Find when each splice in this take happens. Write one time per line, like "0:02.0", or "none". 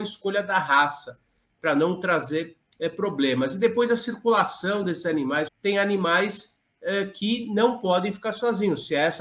0:05.5